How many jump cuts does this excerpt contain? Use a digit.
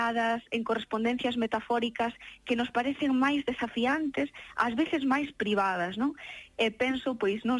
0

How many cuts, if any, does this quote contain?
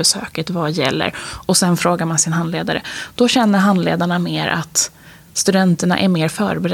0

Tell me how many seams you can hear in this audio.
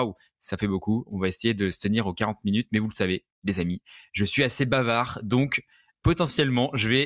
0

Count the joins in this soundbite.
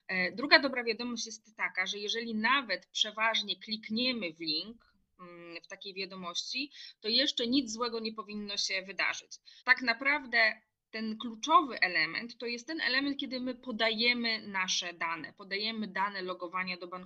1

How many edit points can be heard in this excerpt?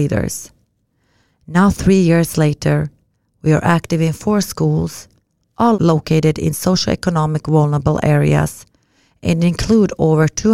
0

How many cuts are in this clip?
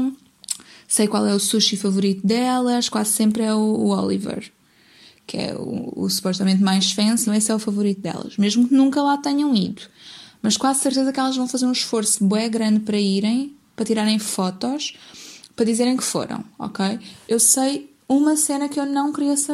2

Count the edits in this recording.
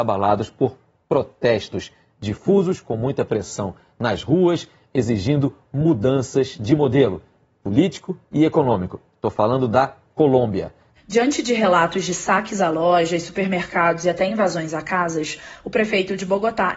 1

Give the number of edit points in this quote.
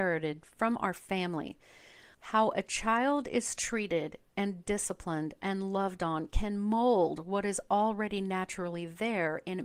1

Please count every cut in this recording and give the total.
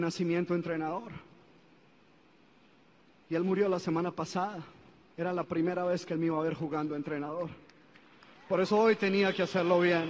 1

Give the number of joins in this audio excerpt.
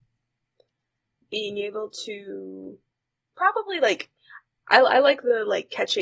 1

